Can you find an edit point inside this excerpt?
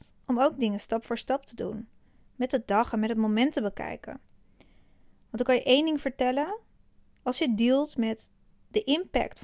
no; 0 cuts

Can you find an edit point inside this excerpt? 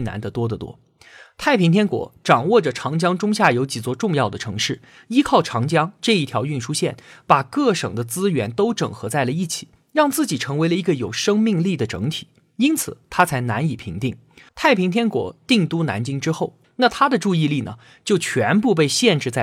yes; 2 cuts; at 14.5 s, 16.6 s

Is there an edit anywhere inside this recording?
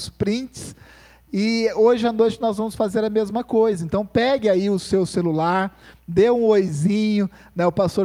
no; 0 cuts

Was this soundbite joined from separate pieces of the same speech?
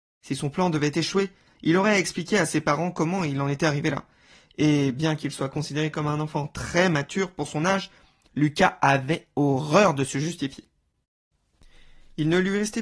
no; 0 cuts

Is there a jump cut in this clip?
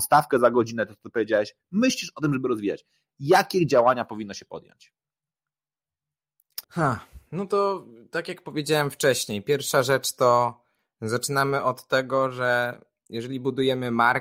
yes; 1 cut; at 6.6 s

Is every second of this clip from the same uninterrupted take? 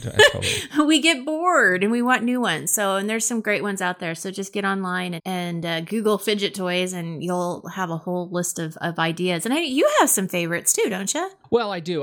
no; 1 cut; at 5.2 s

